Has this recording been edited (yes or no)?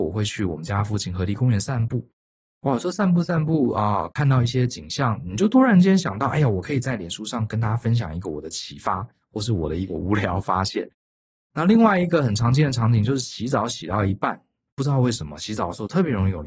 no